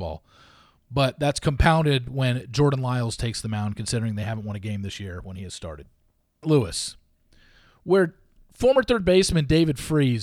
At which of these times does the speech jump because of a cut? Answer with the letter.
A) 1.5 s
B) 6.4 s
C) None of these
B